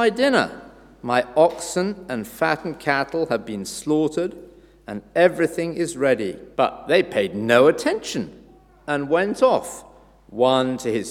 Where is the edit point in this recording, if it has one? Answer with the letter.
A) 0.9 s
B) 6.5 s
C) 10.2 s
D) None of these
B